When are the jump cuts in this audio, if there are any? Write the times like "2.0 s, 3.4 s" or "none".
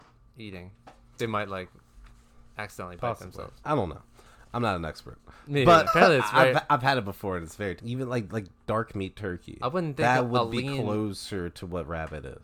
5.9 s, 7.8 s